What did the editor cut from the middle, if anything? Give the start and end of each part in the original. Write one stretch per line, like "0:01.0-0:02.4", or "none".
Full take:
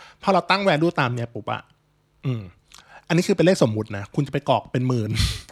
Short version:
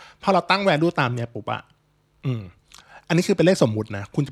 none